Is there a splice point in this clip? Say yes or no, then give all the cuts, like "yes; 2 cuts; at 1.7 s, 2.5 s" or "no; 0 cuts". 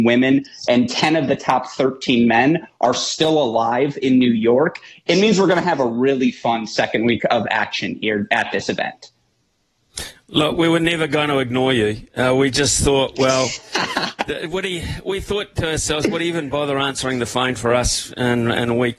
no; 0 cuts